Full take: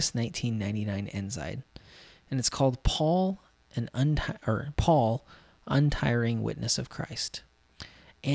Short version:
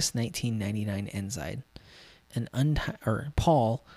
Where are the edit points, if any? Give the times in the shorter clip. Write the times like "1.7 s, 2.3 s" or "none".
2.2 s